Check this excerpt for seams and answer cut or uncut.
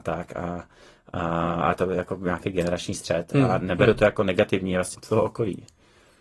cut